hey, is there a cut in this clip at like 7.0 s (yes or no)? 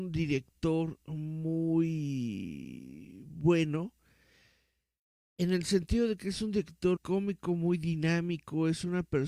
yes